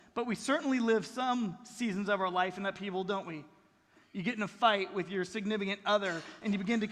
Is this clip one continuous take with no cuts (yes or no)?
yes